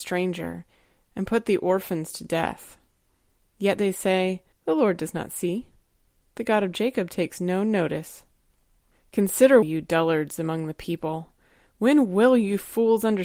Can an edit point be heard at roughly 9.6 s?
yes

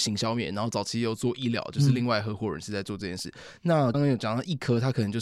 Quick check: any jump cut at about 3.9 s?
yes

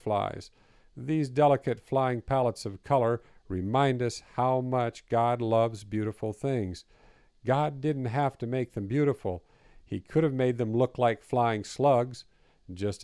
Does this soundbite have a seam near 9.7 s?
no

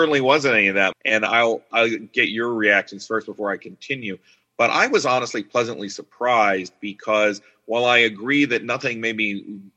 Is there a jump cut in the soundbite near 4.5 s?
no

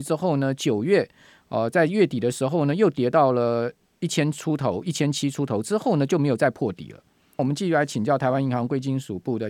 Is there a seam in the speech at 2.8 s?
no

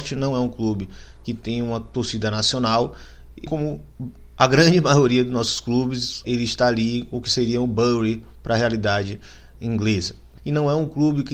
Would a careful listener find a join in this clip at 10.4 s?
yes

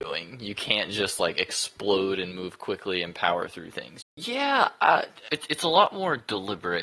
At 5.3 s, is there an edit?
yes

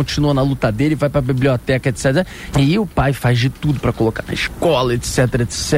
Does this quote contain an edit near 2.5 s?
yes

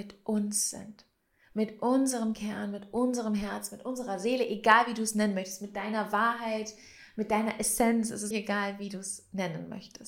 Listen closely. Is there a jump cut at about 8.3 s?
yes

